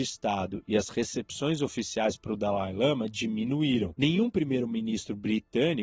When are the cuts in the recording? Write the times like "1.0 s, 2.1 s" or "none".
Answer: 4.0 s